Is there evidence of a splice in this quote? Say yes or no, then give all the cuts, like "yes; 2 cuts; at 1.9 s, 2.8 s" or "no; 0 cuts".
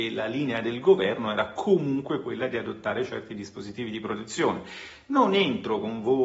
no; 0 cuts